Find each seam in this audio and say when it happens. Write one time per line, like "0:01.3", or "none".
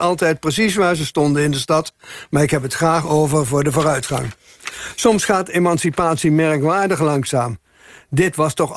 none